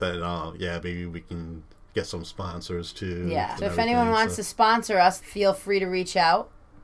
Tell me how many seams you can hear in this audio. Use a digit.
2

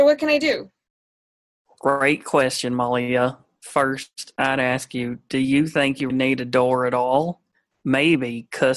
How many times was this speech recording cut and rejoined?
1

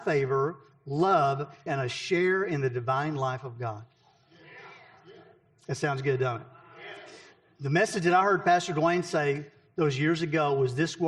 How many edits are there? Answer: 1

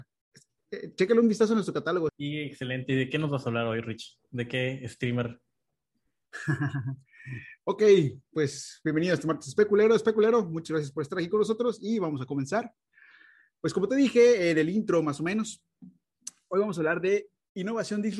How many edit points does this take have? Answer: 1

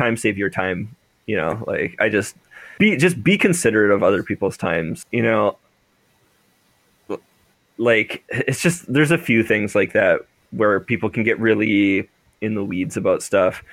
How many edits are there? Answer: 3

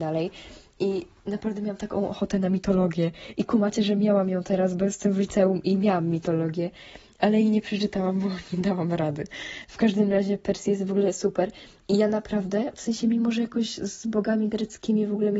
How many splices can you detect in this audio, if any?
0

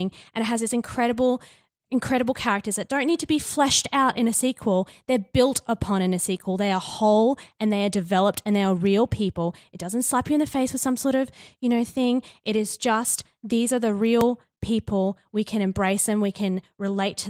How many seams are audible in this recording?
0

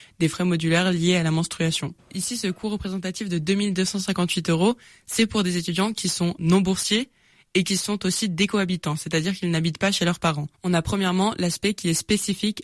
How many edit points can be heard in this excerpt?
2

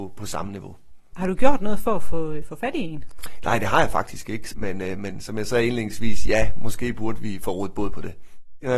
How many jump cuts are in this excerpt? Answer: 1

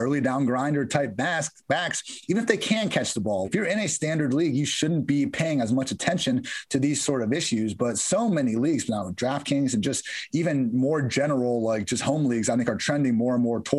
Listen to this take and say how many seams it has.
1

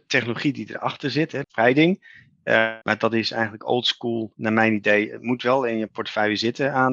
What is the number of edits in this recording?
2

